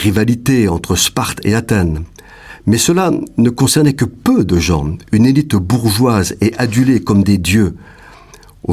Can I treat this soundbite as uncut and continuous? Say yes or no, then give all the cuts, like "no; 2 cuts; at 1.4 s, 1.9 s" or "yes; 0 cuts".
yes; 0 cuts